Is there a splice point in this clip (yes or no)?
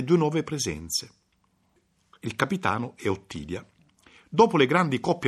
no